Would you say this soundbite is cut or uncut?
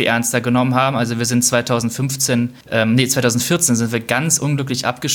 cut